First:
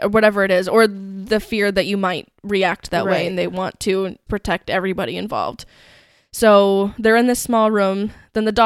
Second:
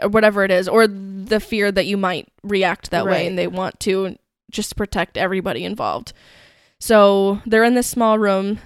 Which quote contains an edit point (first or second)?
first